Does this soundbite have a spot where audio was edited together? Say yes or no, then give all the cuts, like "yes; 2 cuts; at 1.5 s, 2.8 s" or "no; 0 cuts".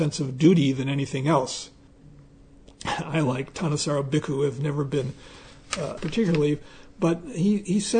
yes; 2 cuts; at 1.9 s, 6.0 s